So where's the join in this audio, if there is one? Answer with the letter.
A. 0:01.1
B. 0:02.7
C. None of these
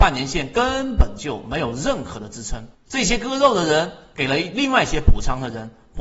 B